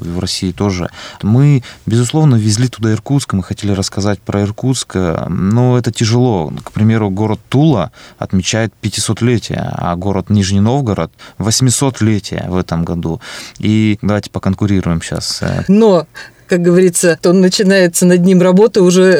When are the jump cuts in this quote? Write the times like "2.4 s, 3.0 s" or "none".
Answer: 1.2 s, 15.7 s, 17.2 s